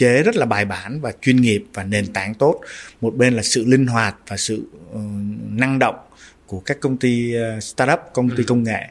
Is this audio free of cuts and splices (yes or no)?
yes